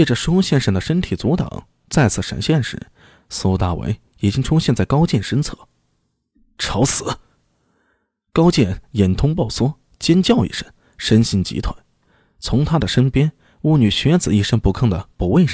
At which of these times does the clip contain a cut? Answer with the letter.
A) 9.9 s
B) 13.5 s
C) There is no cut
C